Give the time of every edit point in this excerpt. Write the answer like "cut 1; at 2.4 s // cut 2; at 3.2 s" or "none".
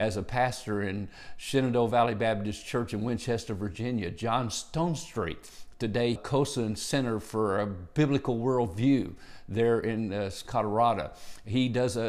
cut 1; at 6.2 s // cut 2; at 10.4 s

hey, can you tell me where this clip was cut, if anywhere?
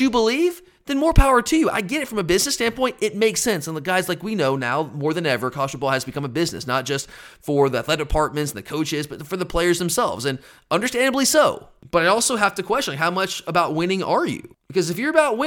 none

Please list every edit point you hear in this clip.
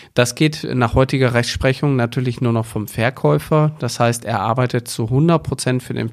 none

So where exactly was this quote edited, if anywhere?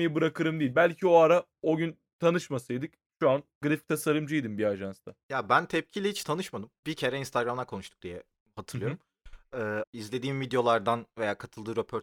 cut 1; at 6.8 s // cut 2; at 9.8 s

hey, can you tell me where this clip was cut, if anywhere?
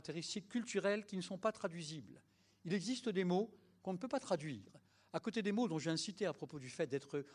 none

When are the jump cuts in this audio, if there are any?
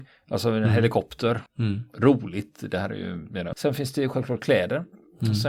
cut 1; at 1.5 s // cut 2; at 3.5 s

